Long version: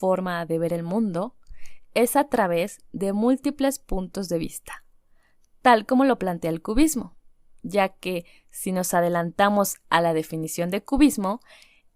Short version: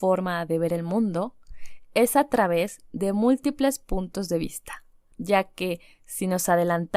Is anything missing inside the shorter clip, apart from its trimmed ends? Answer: yes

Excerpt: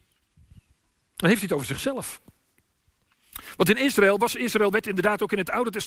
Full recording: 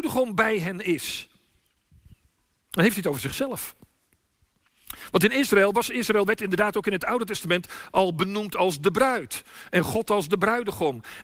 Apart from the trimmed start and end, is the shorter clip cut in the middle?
no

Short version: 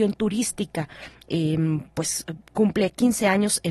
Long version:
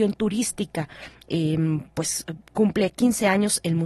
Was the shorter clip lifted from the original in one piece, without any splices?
yes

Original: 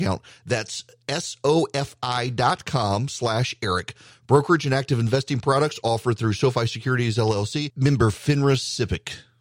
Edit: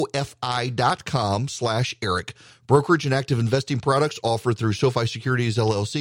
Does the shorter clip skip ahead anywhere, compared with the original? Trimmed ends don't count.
no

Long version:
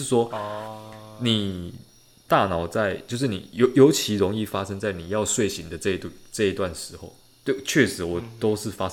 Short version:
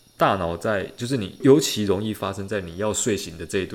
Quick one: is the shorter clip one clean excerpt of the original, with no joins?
no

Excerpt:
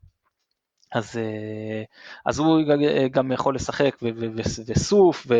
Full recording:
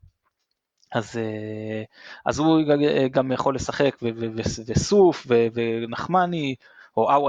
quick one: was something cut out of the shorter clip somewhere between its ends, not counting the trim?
no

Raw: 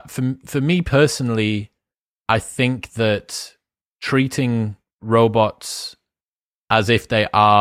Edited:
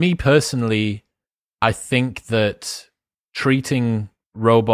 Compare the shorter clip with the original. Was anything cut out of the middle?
no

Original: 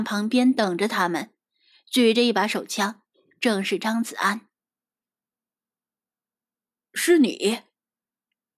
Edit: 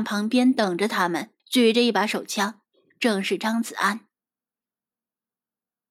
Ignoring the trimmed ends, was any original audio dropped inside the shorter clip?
yes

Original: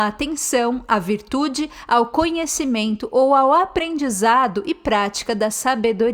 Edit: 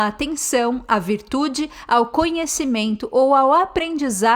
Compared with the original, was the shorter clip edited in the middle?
no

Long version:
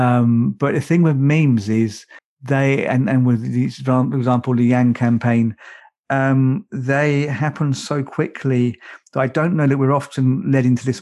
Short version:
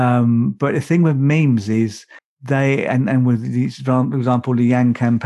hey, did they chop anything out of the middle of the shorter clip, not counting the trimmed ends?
no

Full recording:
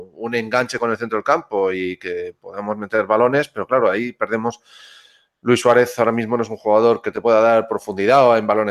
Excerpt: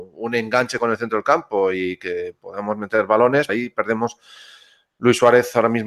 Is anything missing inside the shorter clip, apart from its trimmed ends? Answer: yes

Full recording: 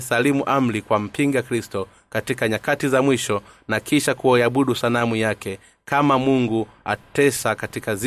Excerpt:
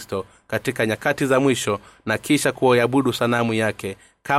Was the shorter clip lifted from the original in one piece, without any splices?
yes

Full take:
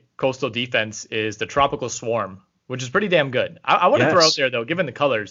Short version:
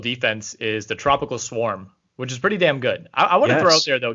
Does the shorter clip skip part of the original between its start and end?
no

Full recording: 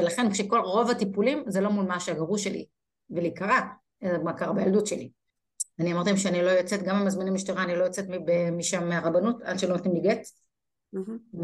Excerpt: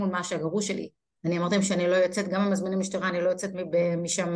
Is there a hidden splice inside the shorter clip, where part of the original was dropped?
yes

